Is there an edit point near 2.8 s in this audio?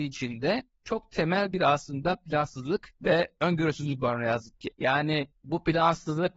no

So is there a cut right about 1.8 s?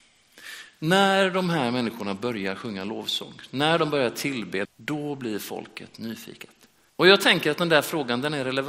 no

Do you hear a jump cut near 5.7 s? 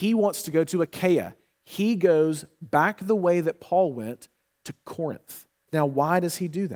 yes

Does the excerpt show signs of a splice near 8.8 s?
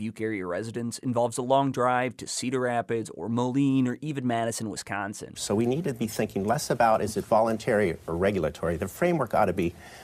no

